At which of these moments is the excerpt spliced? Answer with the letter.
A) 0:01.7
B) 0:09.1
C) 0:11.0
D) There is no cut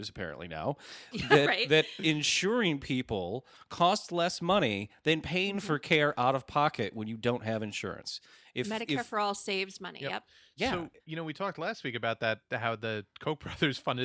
C